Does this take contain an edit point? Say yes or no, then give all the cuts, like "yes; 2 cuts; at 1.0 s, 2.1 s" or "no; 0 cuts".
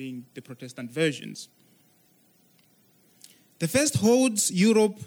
no; 0 cuts